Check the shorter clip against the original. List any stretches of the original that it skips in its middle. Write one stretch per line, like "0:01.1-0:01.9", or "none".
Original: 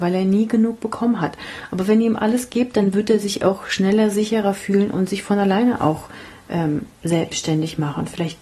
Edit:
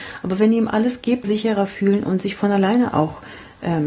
0:02.7-0:04.1